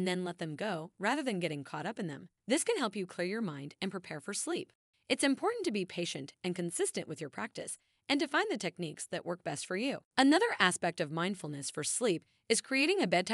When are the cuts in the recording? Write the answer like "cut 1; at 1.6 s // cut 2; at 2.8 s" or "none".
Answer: cut 1; at 2.4 s // cut 2; at 4.9 s // cut 3; at 10.1 s